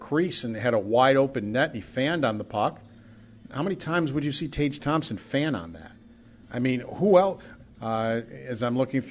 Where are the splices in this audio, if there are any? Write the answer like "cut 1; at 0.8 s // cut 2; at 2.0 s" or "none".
cut 1; at 6.4 s // cut 2; at 7.6 s